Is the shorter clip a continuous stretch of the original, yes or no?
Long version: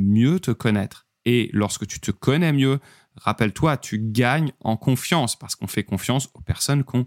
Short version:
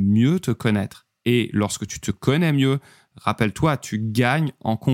yes